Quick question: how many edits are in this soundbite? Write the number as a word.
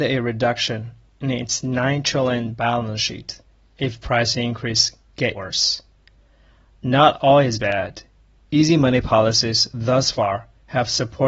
one